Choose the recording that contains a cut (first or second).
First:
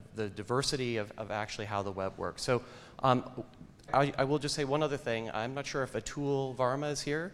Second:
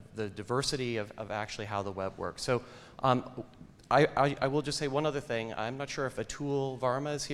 first